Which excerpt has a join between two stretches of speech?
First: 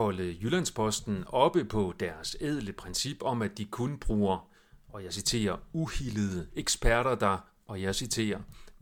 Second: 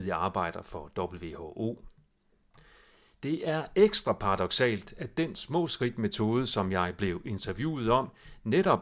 first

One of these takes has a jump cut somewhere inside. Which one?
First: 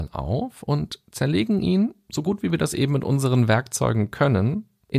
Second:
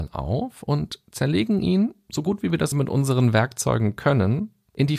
second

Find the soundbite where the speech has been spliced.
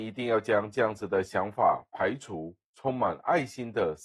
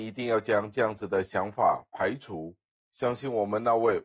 first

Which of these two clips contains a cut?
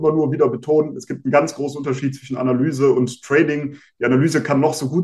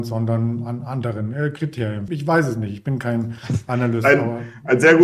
second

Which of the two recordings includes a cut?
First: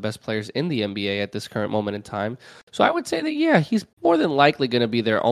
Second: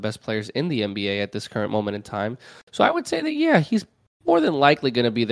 first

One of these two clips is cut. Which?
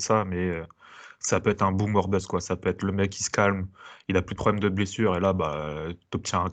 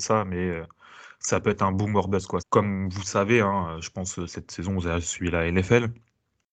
second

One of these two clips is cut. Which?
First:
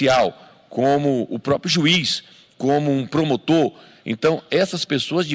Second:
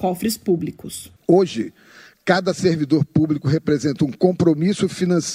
second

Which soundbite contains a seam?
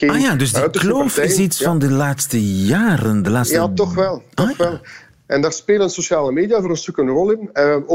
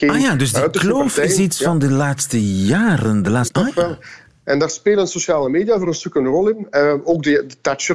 second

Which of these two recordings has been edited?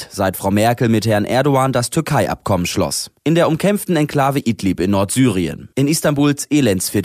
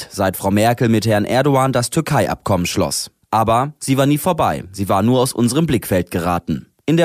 first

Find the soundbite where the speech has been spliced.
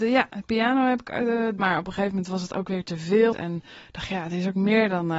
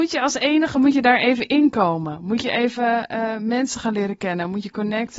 first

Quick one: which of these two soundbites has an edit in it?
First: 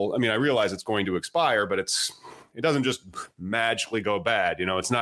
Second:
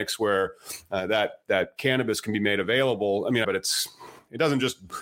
second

